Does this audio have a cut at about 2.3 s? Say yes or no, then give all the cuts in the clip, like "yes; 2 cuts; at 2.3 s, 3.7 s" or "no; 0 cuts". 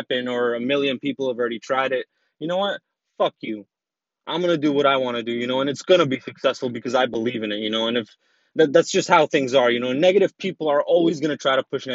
no; 0 cuts